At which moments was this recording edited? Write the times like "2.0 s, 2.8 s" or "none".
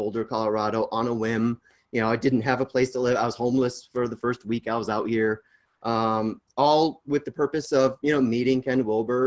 none